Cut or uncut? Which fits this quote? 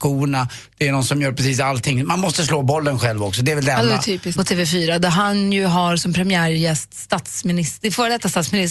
cut